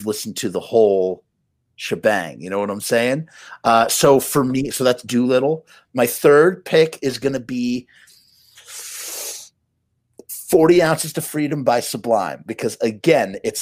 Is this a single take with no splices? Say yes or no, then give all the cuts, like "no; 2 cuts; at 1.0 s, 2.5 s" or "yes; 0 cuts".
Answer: yes; 0 cuts